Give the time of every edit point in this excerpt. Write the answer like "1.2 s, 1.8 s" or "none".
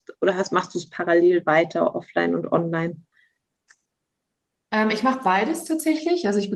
none